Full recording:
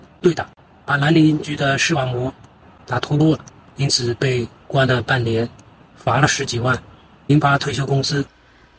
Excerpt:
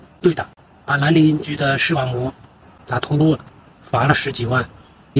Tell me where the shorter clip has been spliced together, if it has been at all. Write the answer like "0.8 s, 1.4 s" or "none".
3.7 s

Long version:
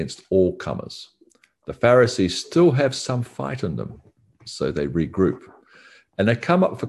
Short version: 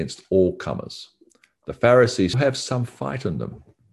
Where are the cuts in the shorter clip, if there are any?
2.3 s

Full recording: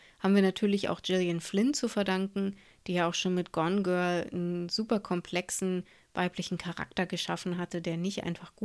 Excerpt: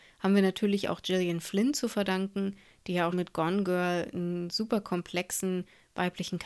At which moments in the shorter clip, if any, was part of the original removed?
3.1 s

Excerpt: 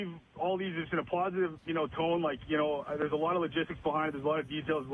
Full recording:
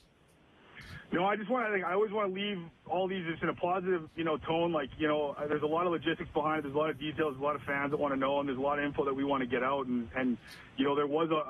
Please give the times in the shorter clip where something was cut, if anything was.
none

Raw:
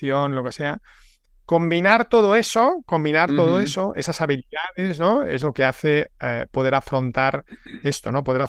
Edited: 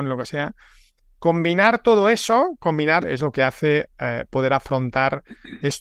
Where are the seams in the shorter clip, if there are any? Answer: 3.0 s

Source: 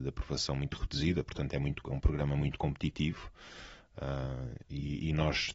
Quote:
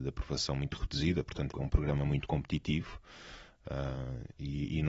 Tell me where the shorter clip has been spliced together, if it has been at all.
1.5 s

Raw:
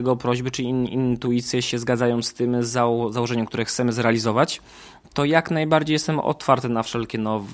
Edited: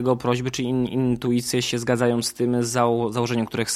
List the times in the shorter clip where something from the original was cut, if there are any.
none

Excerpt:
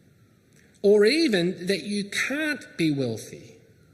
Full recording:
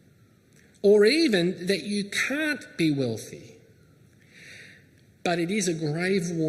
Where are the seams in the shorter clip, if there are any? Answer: none

